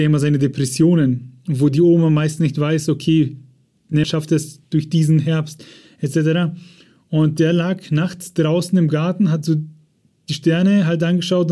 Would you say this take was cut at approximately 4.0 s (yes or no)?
yes